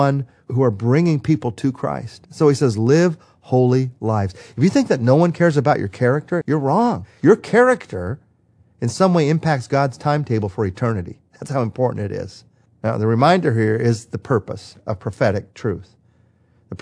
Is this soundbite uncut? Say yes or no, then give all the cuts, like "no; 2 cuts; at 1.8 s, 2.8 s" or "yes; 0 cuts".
no; 2 cuts; at 6.4 s, 12.7 s